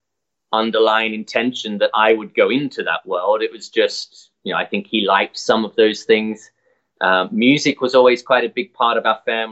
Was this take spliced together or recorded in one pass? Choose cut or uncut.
uncut